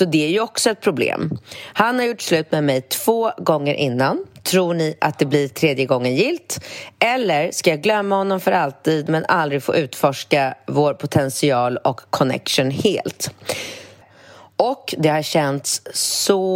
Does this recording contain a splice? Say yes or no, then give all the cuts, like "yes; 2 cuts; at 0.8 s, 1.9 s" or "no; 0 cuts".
yes; 1 cut; at 14.0 s